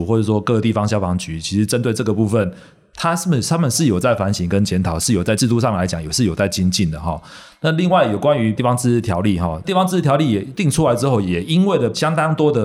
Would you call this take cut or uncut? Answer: uncut